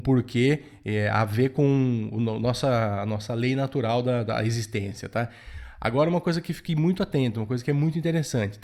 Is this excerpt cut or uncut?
uncut